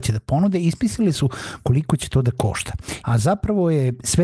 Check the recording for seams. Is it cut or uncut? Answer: cut